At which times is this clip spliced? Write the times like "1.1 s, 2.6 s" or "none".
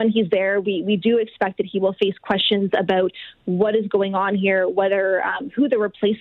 none